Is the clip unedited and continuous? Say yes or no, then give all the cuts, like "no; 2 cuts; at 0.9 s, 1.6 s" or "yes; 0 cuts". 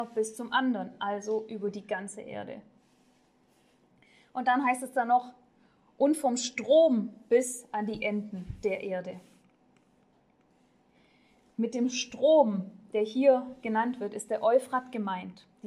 yes; 0 cuts